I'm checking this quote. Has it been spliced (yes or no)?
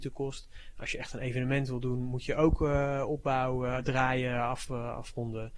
no